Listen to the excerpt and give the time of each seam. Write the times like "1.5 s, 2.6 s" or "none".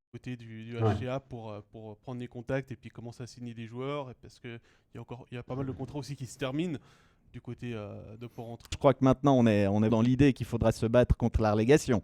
8.7 s, 9.9 s